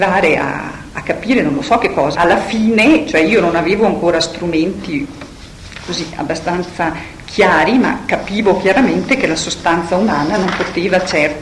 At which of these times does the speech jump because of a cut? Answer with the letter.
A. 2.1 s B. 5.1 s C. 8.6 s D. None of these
A